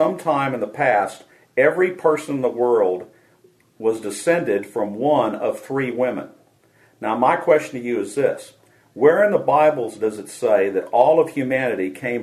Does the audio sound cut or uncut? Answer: uncut